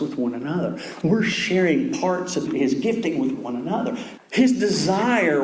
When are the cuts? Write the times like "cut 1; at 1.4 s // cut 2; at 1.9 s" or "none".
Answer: cut 1; at 2.5 s // cut 2; at 4.2 s